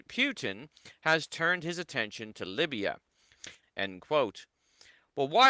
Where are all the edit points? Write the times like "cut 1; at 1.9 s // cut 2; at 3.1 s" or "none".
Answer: cut 1; at 3.6 s